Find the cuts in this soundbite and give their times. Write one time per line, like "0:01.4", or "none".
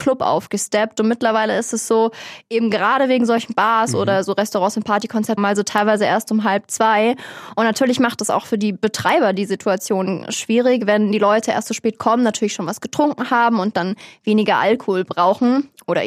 0:05.4